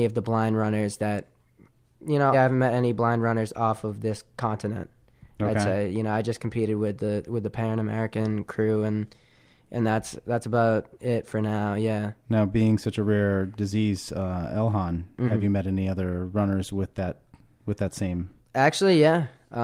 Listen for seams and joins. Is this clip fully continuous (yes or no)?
no